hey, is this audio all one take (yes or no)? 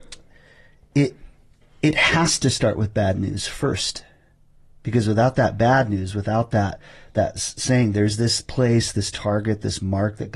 yes